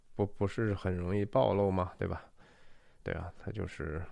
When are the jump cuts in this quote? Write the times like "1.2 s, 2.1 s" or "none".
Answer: 3.0 s